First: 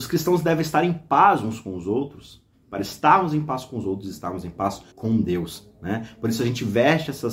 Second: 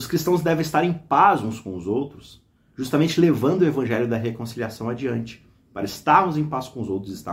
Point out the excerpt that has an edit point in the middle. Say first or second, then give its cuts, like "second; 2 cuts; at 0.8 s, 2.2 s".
first; 2 cuts; at 2.5 s, 4.9 s